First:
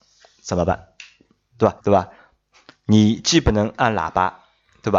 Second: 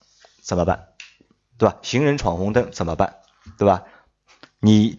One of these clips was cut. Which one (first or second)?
first